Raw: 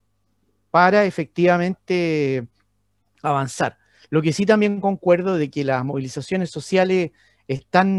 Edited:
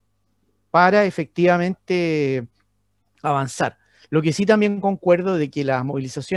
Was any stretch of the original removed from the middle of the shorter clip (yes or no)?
no